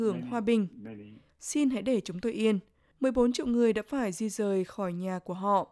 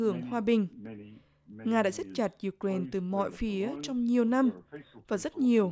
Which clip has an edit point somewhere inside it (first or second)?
first